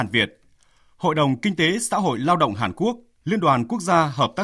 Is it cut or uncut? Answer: cut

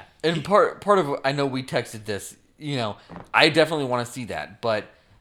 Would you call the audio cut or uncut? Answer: uncut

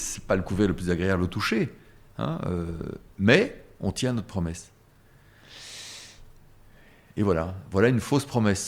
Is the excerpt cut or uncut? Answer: uncut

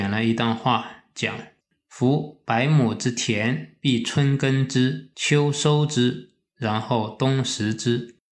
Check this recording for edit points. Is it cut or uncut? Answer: cut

